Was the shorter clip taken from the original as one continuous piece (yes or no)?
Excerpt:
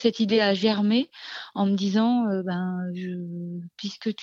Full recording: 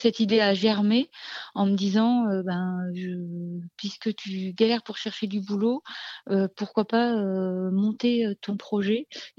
yes